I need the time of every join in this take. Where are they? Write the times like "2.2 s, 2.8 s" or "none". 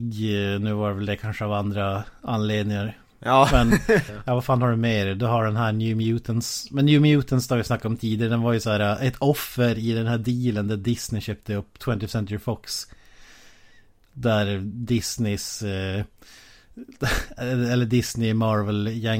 4.1 s

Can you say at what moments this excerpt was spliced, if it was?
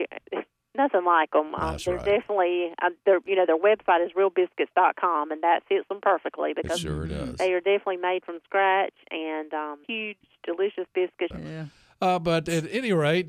9.8 s, 11.3 s

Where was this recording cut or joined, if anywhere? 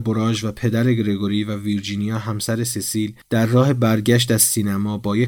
3.2 s

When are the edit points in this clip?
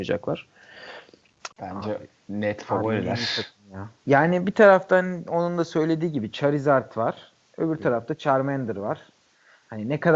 1.5 s, 4.0 s

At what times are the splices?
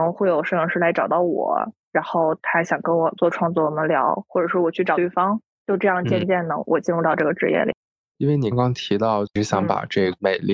8.5 s

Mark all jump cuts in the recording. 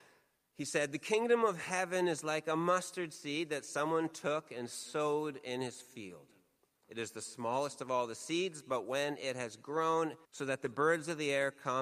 10.2 s

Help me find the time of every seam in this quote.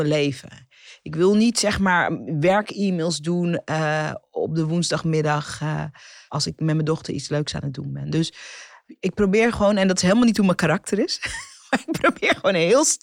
none

